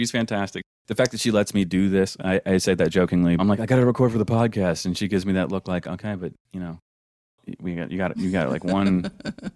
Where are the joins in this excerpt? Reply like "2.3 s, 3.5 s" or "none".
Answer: 3.4 s